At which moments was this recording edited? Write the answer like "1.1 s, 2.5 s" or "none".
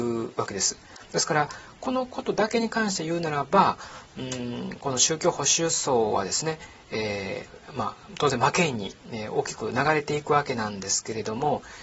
none